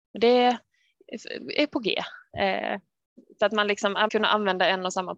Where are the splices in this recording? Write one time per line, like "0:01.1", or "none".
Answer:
0:04.1